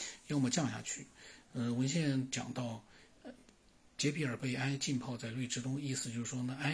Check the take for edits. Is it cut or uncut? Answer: uncut